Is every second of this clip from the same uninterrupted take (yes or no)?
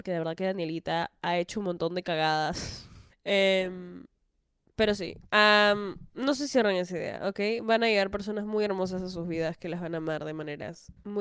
no